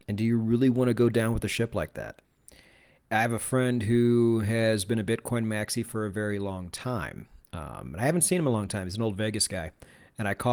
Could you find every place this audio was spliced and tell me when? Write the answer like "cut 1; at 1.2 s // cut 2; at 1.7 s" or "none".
none